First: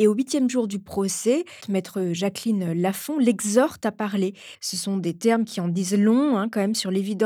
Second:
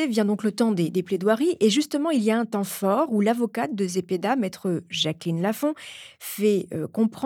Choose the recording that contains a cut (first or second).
first